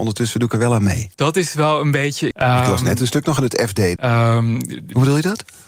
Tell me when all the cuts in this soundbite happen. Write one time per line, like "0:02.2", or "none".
0:01.1
0:02.3
0:04.0